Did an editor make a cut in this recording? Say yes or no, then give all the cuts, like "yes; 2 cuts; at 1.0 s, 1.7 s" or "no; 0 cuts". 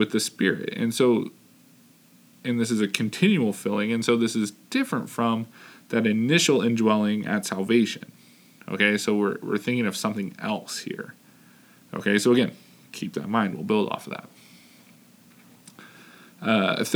no; 0 cuts